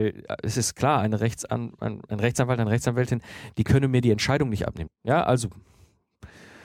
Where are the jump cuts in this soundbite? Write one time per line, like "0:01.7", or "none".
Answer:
0:04.9